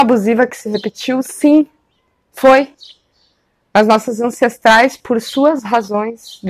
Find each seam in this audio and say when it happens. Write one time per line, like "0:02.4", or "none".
none